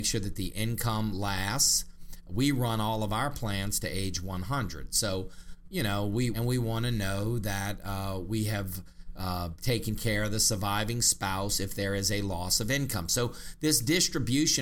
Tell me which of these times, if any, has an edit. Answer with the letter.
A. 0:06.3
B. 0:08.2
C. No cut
A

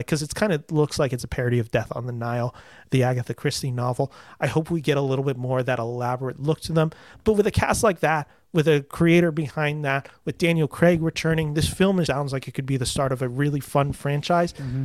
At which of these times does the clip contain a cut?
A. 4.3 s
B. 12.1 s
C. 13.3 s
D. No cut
B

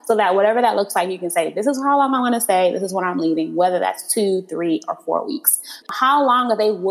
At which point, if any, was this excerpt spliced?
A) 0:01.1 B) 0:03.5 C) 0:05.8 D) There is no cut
C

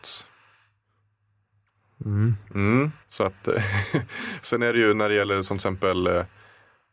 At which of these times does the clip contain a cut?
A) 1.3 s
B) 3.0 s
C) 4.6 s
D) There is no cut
B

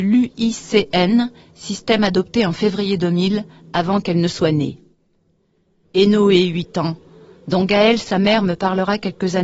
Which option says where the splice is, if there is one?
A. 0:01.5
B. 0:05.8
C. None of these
B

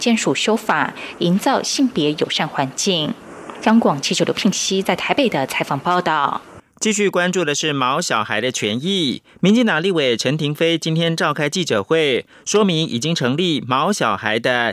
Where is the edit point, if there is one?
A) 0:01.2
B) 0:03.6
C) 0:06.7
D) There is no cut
A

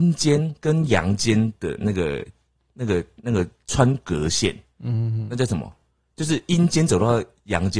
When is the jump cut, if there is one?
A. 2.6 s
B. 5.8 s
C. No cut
C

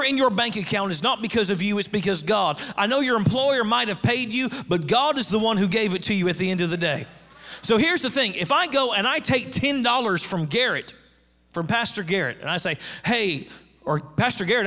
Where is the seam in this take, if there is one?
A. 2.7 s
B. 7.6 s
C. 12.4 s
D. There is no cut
D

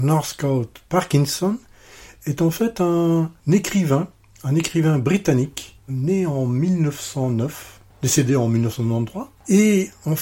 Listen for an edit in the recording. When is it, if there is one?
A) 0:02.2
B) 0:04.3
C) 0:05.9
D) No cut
C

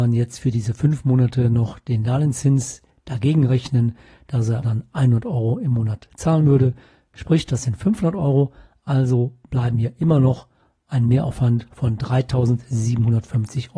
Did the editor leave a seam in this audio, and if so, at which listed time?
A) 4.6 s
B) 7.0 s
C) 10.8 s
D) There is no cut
A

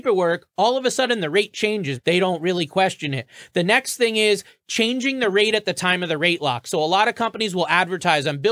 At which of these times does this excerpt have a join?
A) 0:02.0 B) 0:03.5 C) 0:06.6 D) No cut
A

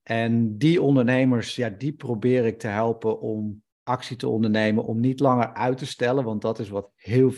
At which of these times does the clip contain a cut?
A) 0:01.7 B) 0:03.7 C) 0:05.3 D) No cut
B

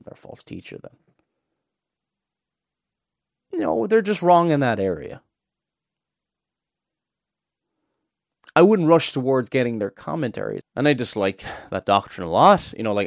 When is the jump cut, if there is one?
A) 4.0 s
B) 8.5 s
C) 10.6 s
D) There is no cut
C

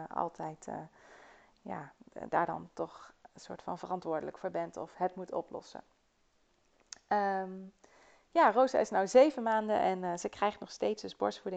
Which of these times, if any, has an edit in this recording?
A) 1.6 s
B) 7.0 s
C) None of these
C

